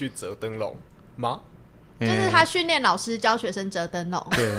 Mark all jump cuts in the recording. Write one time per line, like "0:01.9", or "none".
none